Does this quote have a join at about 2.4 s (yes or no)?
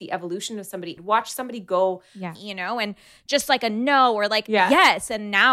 yes